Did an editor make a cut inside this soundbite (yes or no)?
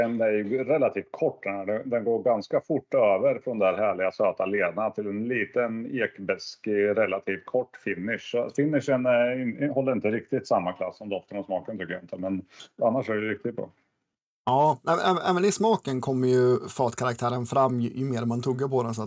no